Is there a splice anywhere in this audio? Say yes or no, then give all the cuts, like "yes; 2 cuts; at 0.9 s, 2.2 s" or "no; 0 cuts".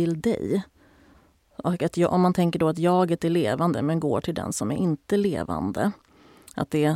no; 0 cuts